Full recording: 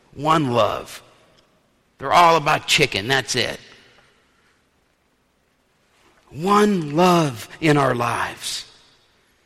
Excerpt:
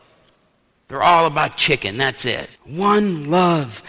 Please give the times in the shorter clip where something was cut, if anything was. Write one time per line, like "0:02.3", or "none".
0:02.6